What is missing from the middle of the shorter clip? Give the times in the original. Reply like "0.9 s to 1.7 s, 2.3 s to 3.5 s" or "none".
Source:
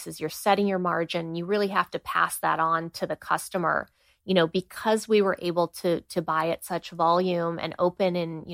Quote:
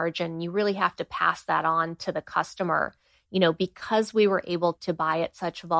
5.7 s to 6.0 s

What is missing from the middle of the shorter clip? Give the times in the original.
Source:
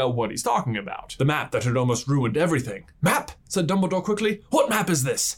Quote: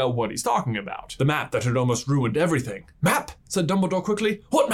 none

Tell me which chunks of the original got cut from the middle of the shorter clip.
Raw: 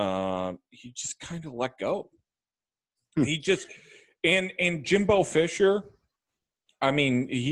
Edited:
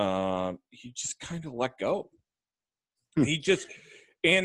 none

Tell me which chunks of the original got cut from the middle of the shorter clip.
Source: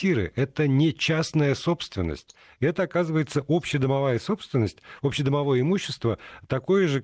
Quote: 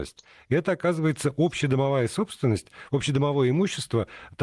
none

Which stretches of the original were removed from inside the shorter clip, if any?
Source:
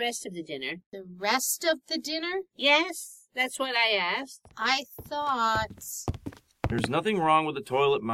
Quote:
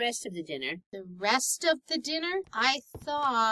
2.4 s to 4.5 s

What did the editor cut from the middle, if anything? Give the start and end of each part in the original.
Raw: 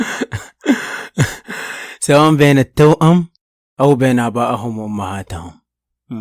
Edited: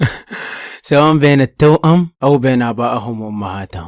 3.3 s to 3.7 s

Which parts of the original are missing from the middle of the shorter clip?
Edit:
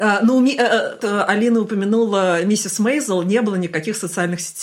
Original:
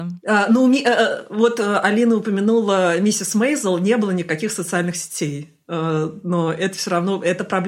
1.3 s to 1.6 s

